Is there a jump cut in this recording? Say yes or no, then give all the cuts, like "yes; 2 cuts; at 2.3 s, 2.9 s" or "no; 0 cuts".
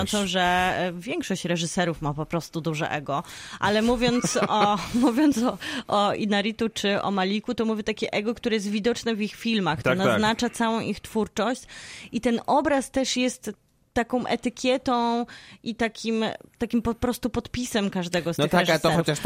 no; 0 cuts